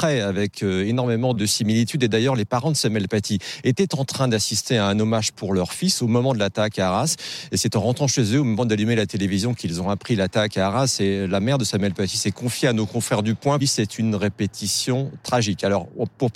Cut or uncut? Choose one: cut